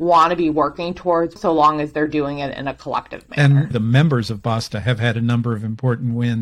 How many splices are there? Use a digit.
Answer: 1